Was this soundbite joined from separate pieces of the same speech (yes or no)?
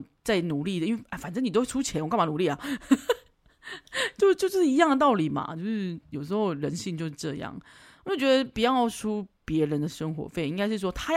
no